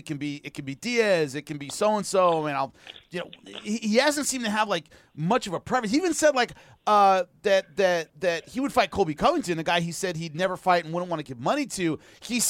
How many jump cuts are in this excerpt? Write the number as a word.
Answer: zero